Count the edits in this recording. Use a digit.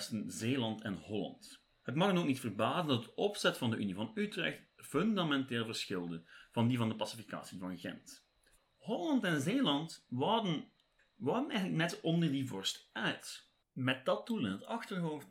3